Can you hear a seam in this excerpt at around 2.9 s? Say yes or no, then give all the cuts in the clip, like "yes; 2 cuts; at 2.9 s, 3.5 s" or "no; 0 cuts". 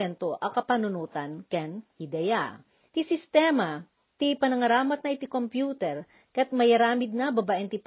yes; 1 cut; at 2.9 s